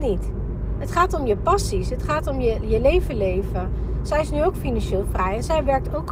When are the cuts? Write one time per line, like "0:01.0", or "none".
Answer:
none